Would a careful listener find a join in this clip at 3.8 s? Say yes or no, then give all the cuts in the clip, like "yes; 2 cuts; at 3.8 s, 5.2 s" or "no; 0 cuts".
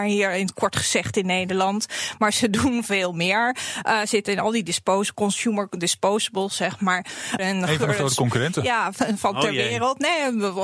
no; 1 cut; at 7.4 s